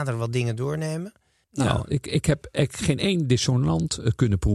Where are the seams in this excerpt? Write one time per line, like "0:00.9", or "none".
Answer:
0:01.4